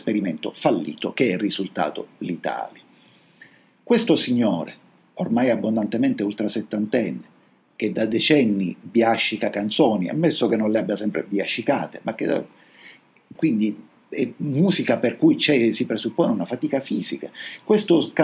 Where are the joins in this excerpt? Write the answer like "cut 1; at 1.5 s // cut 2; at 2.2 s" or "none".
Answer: cut 1; at 13.3 s